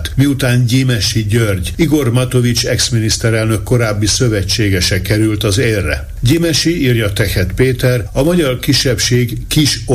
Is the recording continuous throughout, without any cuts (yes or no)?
yes